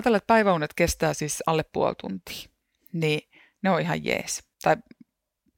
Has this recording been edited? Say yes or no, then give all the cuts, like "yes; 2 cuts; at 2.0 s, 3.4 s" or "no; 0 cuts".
yes; 1 cut; at 4.5 s